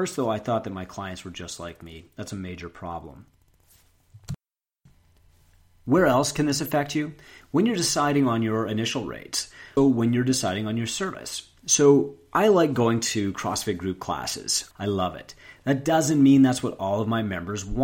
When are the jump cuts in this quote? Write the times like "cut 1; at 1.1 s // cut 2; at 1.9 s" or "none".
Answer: cut 1; at 9.8 s // cut 2; at 14.7 s